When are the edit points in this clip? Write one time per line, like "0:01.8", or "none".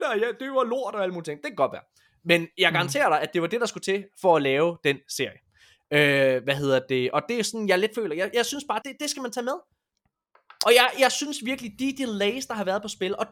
0:08.8
0:10.9